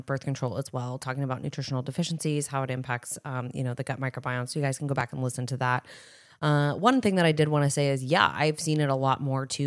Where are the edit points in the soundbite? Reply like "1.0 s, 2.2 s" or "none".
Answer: none